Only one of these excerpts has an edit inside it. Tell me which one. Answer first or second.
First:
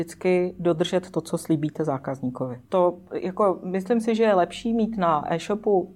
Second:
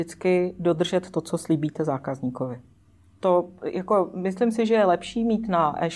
first